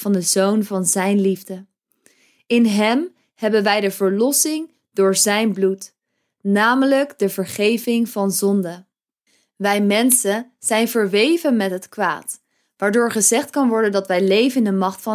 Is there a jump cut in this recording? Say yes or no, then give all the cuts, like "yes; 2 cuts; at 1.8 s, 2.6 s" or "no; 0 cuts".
no; 0 cuts